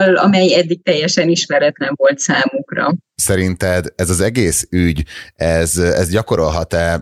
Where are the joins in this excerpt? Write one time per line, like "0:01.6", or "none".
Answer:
none

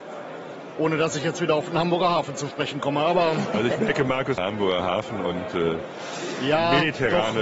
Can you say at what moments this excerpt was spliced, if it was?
0:04.4

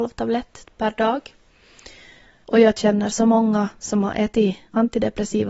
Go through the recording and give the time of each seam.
0:02.4

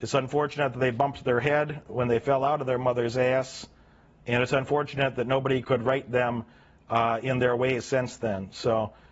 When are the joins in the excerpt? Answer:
0:05.6

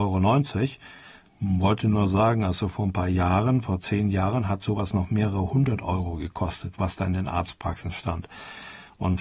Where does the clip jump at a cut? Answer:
none

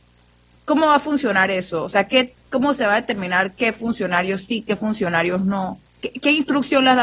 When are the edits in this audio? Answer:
none

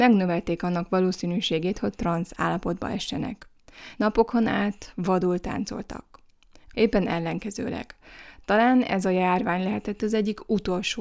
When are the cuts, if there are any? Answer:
0:03.9
0:06.7

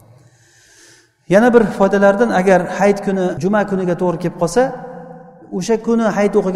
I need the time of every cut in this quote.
none

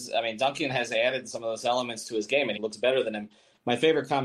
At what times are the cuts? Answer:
0:02.6

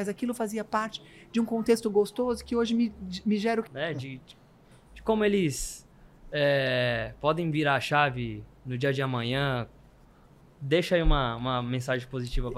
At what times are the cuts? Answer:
0:03.7

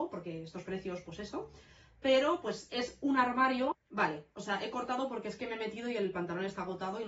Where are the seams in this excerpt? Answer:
0:03.7

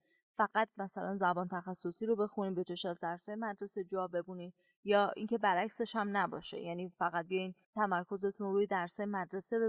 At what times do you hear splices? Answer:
0:07.6

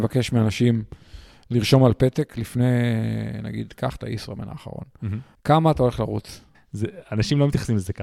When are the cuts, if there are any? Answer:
0:05.3
0:06.5

